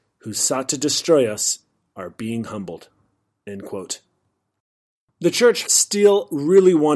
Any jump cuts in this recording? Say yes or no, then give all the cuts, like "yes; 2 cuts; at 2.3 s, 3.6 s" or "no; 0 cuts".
yes; 1 cut; at 5.6 s